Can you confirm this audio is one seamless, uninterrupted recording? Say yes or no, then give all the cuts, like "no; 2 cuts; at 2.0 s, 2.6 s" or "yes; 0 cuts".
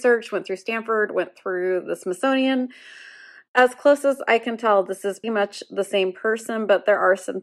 no; 1 cut; at 5.2 s